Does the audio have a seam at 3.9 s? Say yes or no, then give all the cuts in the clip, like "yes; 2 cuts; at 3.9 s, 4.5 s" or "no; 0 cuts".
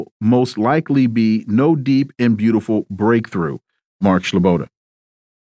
no; 0 cuts